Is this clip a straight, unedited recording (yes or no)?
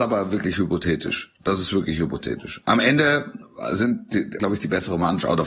no